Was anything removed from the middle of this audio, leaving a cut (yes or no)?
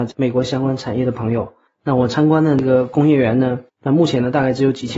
yes